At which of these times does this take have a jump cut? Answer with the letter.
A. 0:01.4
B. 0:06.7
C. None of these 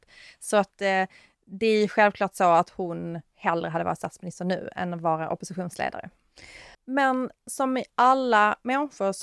B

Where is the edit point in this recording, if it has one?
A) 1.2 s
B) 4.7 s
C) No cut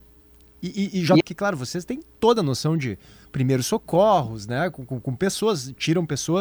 A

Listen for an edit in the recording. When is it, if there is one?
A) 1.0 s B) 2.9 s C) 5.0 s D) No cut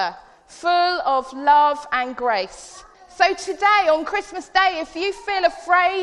B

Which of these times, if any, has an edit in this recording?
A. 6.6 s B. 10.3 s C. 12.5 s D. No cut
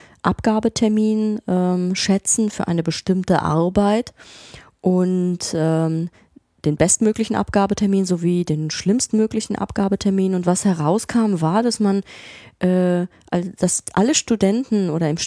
D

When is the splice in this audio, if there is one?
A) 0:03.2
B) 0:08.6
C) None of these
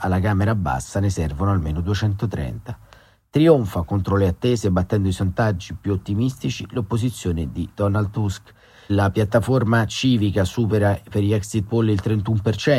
C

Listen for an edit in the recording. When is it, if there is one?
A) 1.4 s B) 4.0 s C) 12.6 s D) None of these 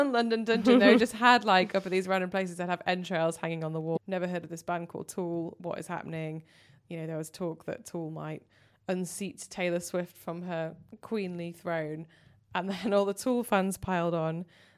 B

